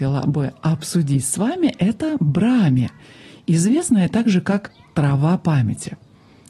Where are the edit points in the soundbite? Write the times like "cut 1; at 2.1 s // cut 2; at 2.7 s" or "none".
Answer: none